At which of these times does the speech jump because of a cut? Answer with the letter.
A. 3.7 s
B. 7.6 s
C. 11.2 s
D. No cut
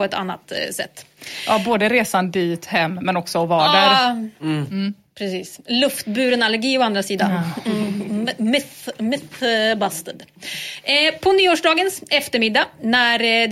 D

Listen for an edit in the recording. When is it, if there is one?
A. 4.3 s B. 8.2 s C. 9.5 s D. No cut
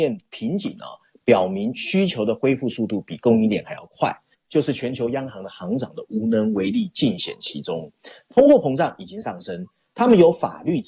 A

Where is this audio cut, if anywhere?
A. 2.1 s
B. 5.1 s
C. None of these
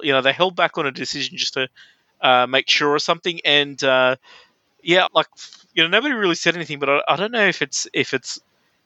B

